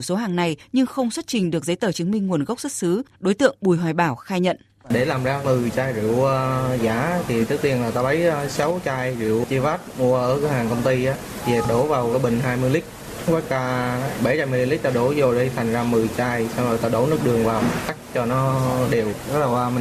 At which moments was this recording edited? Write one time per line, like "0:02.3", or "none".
0:03.1